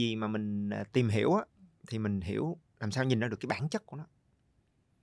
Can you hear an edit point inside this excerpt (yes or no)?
no